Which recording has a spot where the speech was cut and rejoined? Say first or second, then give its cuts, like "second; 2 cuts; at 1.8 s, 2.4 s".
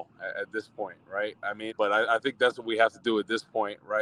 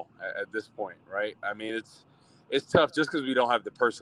first; 1 cut; at 1.7 s